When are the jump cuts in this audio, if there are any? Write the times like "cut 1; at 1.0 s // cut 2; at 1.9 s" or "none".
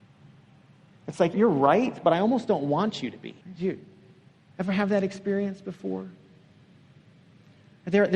cut 1; at 1.3 s // cut 2; at 3.4 s